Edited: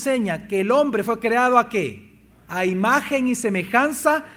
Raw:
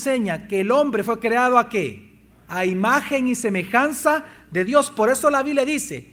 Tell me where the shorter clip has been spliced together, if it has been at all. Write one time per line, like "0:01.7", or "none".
none